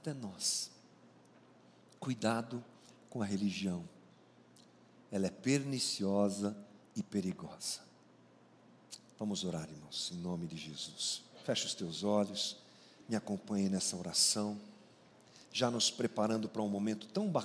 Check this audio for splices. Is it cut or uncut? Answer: uncut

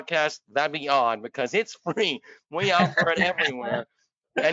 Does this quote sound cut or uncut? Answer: uncut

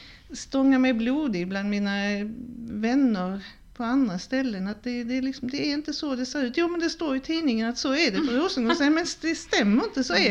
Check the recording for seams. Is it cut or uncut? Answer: uncut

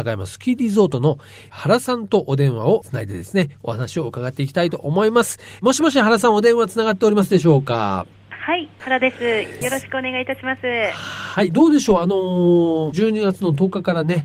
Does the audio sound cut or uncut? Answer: uncut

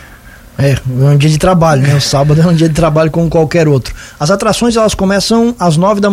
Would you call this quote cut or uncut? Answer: uncut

